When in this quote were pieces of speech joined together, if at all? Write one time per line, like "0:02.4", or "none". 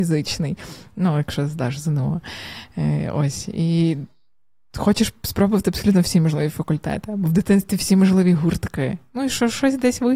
none